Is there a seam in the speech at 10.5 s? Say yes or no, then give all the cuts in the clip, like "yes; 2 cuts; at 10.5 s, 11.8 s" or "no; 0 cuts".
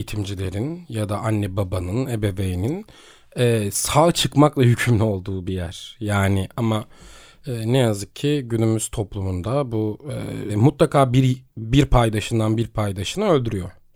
yes; 1 cut; at 10.5 s